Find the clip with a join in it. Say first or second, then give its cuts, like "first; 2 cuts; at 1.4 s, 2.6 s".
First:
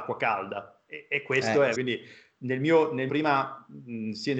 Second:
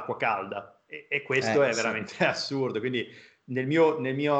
first; 2 cuts; at 1.7 s, 3.1 s